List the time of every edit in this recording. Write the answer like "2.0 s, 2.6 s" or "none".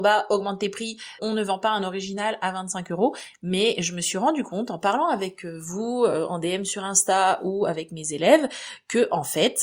1.2 s

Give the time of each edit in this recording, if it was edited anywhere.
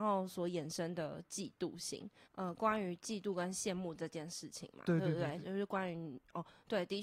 2.3 s

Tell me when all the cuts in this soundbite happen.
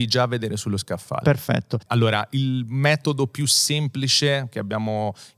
1.9 s

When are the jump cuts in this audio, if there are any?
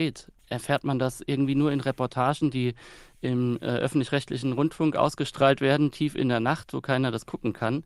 none

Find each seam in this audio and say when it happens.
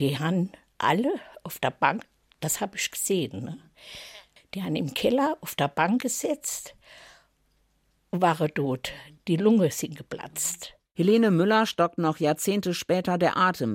none

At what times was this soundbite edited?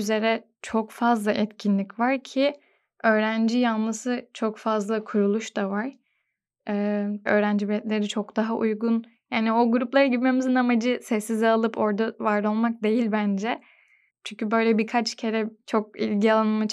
7.3 s, 9.1 s, 14.1 s

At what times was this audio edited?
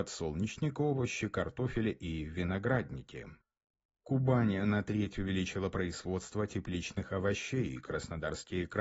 none

